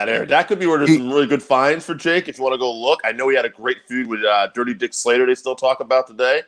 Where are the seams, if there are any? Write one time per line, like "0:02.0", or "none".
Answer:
none

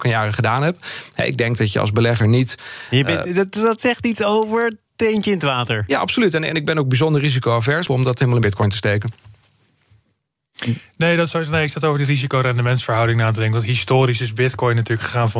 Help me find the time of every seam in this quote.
0:07.9

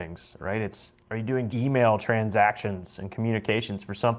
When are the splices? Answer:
0:01.5

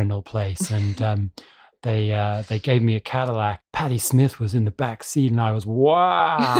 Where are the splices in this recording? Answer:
0:03.6

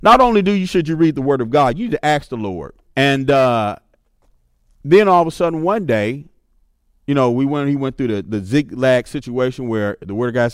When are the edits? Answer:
0:02.9

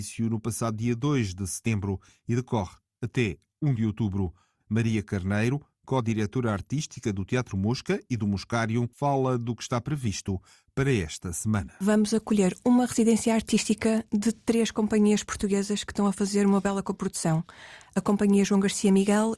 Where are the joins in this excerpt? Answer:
0:08.9
0:17.8

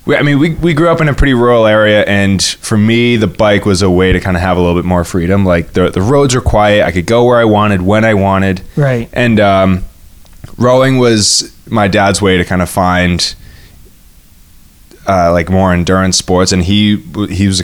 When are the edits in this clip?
none

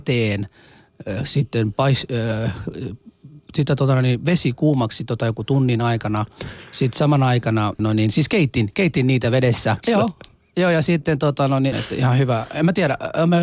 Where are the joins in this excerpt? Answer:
0:07.8
0:09.8
0:11.7

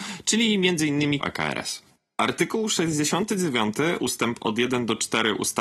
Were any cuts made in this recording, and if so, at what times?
0:01.2

